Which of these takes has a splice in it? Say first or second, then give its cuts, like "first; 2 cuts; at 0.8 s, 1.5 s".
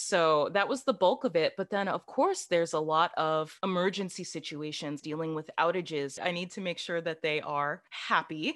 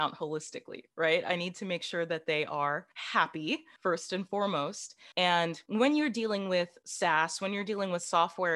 first; 2 cuts; at 5.0 s, 6.2 s